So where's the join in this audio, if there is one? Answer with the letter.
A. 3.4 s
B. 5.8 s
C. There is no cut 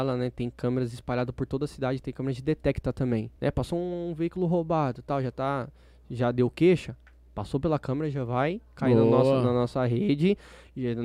A